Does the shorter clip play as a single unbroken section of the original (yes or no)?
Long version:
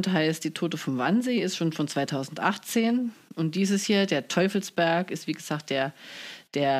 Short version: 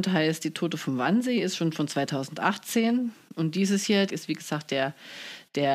no